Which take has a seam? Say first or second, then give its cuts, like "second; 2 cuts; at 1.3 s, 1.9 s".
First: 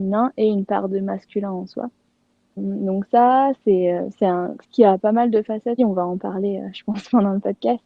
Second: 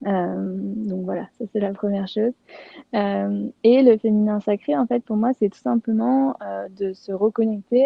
first; 3 cuts; at 2.6 s, 4.6 s, 5.8 s